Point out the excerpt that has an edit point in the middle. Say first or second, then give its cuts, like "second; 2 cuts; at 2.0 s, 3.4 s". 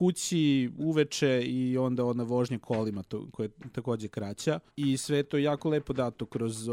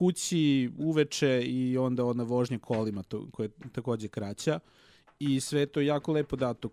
first; 1 cut; at 4.7 s